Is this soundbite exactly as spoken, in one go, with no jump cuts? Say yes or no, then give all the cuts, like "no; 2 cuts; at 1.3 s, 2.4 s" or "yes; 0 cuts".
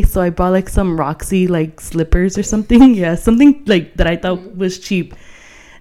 yes; 0 cuts